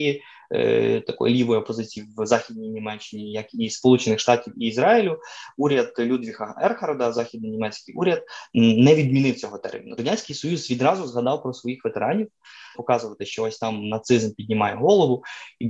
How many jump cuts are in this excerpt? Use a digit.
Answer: 2